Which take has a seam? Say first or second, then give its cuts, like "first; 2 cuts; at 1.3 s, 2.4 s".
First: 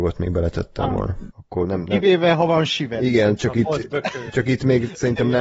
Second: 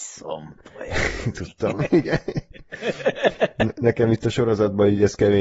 first; 1 cut; at 1.3 s